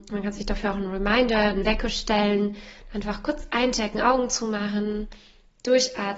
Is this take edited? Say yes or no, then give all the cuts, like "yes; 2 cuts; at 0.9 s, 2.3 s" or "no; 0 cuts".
no; 0 cuts